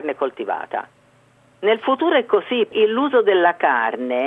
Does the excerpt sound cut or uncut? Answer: uncut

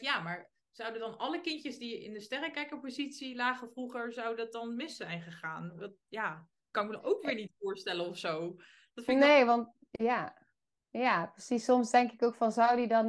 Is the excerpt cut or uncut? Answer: uncut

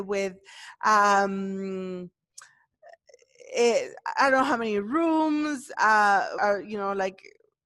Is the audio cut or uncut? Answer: cut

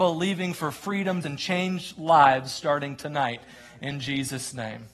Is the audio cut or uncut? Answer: cut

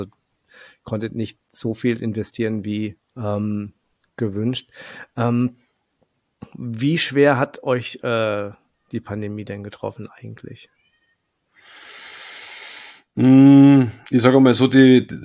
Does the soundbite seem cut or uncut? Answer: cut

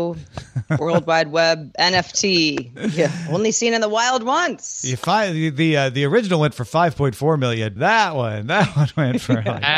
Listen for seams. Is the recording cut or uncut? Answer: cut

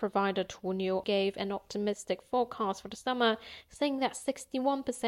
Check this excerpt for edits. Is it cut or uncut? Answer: cut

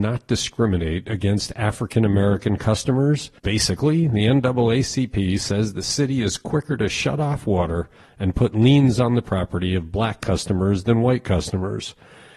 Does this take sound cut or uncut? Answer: cut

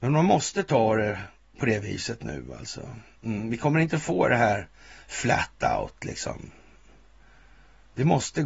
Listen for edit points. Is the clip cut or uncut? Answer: uncut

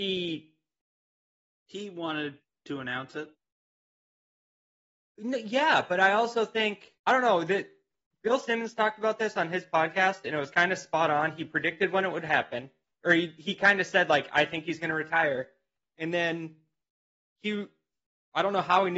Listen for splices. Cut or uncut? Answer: cut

